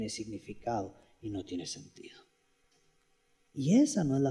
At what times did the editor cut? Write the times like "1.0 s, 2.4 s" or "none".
none